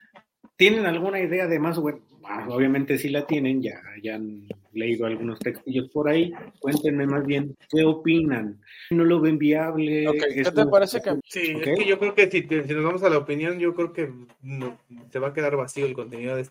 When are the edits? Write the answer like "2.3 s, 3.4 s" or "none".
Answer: 8.9 s, 11.2 s